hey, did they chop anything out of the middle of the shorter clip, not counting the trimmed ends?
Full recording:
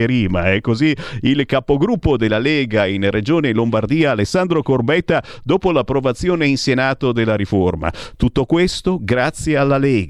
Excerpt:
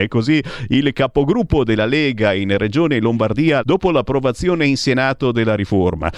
yes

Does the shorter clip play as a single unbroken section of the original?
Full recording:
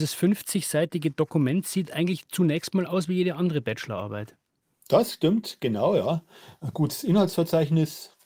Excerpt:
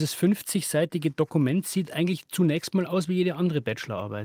yes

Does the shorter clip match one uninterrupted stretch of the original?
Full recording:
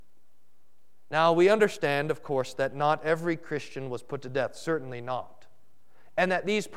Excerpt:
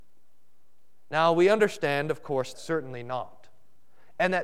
no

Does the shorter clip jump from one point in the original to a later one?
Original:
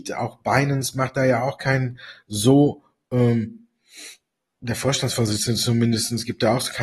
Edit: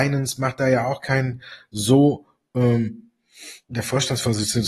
yes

